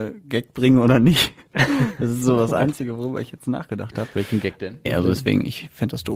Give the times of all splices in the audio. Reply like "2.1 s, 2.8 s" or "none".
4.9 s